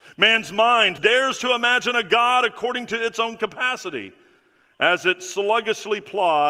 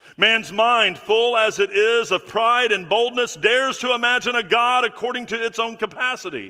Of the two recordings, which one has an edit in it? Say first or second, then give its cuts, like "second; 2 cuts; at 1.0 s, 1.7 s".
first; 1 cut; at 1.0 s